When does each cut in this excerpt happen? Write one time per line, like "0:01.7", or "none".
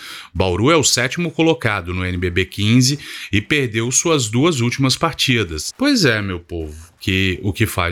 0:05.7
0:07.0